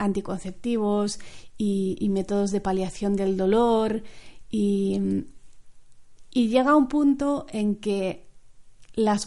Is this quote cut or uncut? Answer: uncut